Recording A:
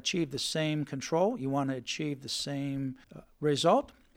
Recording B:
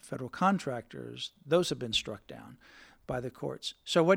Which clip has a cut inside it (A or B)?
A